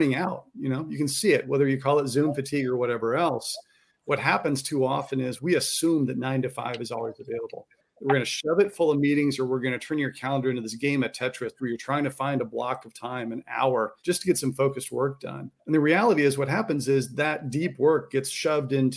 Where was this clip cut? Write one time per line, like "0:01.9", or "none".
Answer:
0:14.0
0:15.6